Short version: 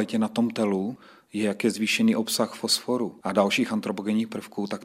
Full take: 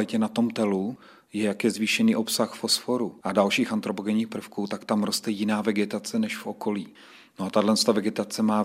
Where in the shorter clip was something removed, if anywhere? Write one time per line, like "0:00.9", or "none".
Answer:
none